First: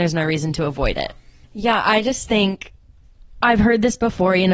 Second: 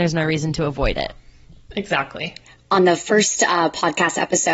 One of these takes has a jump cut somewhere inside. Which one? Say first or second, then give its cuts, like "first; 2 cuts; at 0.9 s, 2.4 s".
first; 1 cut; at 1.4 s